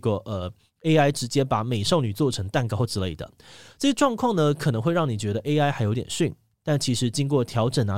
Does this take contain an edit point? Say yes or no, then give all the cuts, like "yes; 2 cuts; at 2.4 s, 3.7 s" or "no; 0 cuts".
no; 0 cuts